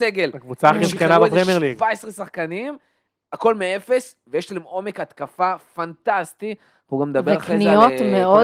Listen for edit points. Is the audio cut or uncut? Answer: uncut